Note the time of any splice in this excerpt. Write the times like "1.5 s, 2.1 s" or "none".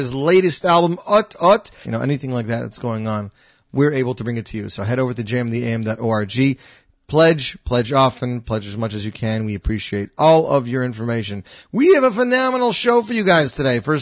1.8 s